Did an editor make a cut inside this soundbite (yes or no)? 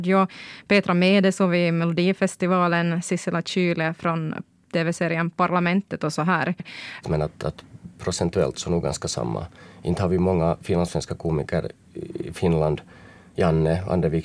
yes